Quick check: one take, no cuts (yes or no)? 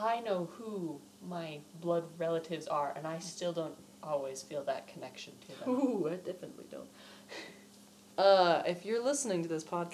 yes